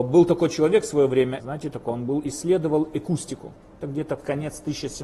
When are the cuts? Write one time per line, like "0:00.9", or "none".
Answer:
0:01.4